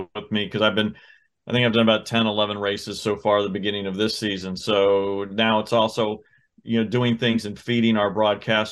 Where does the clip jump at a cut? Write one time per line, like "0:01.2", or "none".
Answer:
none